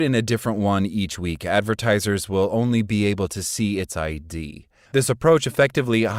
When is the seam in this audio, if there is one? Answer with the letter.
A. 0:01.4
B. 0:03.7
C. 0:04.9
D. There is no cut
C